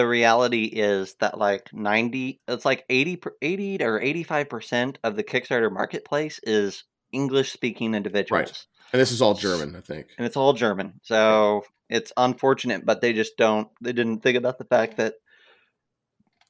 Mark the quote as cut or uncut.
uncut